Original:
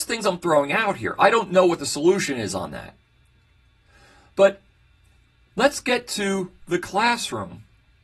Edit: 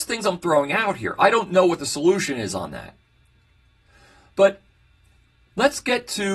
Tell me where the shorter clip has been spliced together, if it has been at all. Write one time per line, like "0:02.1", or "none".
none